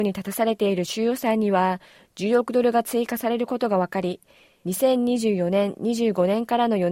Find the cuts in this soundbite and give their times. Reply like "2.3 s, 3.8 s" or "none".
none